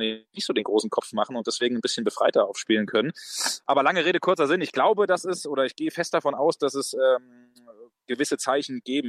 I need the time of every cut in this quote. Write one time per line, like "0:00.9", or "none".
none

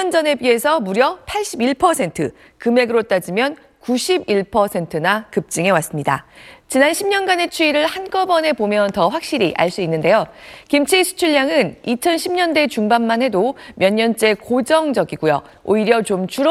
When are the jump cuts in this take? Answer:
none

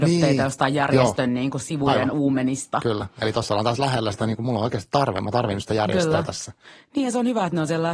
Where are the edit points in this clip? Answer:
none

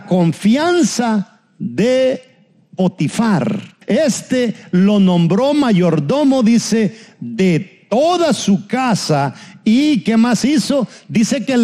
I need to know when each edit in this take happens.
0:03.8

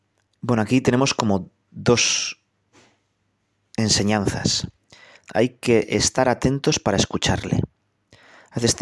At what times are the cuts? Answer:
0:05.2

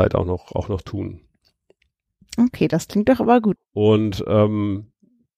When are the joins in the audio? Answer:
0:03.6

